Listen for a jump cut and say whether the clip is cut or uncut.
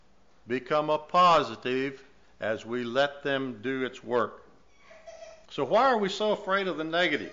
cut